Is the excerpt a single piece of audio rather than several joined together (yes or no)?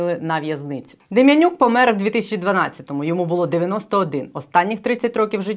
yes